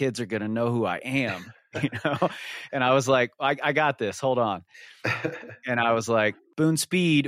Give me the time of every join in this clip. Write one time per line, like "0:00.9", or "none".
none